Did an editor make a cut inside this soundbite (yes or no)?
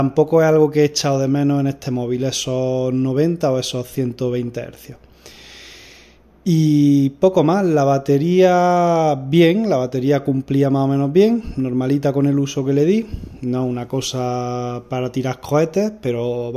no